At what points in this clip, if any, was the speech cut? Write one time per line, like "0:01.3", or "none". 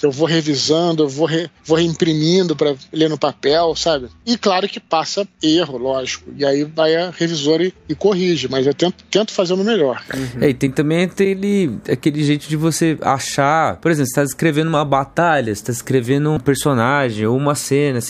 0:04.2
0:16.4